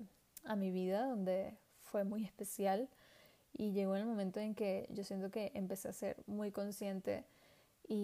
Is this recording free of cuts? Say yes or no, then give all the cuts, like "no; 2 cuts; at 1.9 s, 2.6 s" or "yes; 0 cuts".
yes; 0 cuts